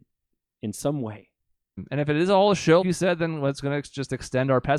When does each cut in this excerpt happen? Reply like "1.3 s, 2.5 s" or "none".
1.8 s, 2.8 s